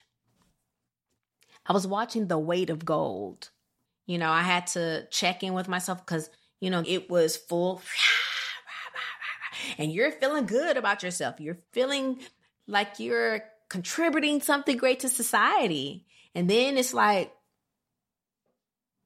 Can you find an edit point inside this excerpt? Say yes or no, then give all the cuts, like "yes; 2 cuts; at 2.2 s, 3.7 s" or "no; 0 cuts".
yes; 2 cuts; at 3.9 s, 6.8 s